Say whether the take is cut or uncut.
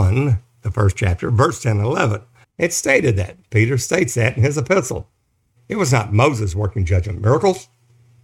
cut